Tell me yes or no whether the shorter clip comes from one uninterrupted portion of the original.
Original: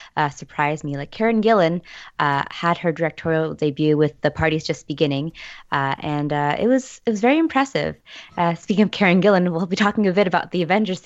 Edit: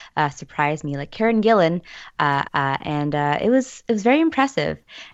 no